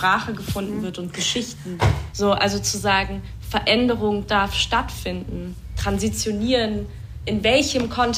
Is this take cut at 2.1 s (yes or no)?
yes